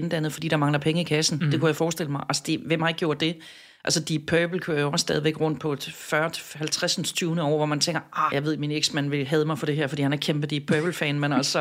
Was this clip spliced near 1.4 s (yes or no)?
no